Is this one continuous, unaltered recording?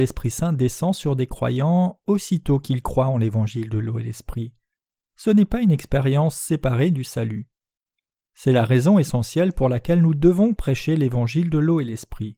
yes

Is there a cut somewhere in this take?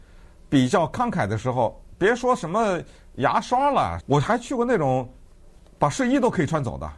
yes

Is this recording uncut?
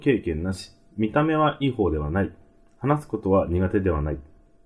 no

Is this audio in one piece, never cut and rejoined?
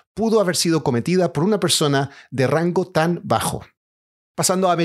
yes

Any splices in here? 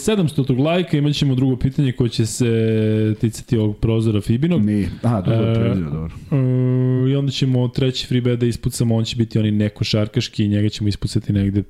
no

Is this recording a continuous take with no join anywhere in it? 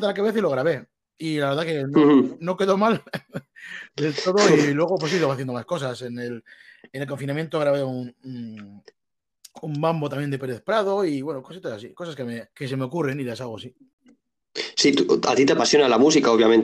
no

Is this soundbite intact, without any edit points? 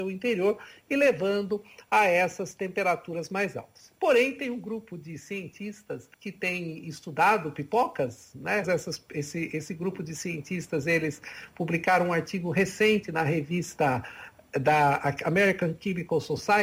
no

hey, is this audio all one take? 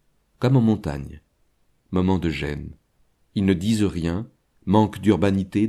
yes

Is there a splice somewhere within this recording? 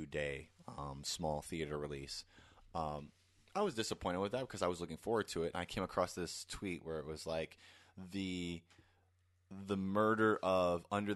no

